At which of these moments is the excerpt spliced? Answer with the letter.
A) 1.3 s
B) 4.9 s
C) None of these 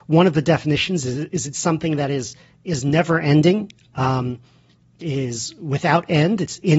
C